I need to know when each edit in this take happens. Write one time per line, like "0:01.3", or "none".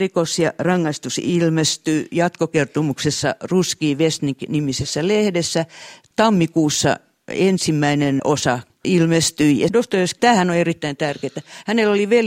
0:10.2